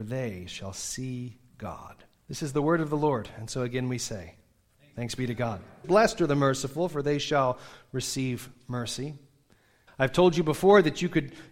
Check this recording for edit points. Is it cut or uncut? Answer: cut